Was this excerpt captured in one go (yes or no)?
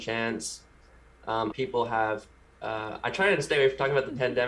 no